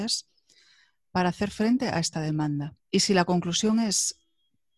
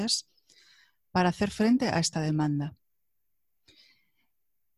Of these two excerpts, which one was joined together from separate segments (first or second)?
first